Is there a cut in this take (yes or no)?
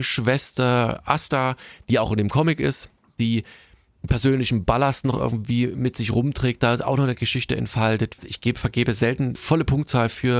yes